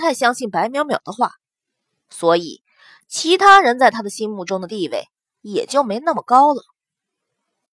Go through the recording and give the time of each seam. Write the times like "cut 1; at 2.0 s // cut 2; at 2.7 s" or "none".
none

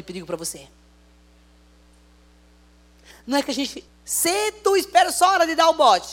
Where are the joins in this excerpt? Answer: cut 1; at 3.9 s

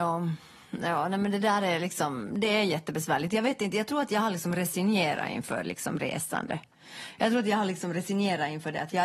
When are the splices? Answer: none

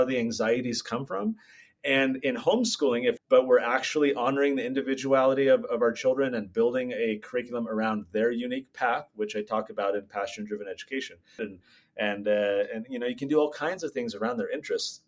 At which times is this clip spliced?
cut 1; at 3.2 s // cut 2; at 11.4 s

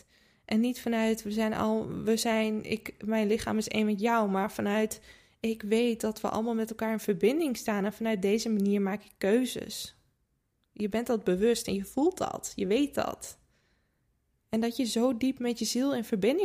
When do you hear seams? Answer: none

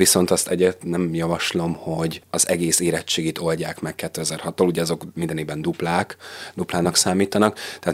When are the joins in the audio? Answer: cut 1; at 2.2 s

